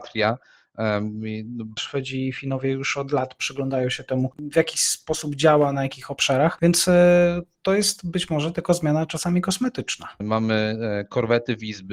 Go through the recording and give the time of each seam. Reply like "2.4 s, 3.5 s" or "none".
1.8 s, 10.2 s